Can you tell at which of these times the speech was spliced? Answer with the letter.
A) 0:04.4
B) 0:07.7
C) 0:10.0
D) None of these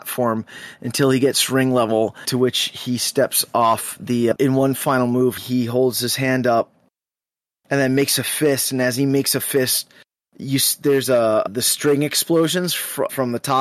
A